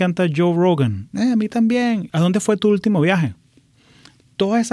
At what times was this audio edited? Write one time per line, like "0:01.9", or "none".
0:02.1